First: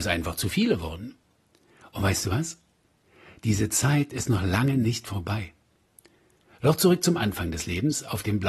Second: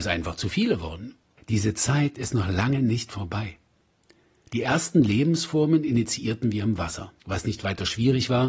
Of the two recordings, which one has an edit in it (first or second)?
second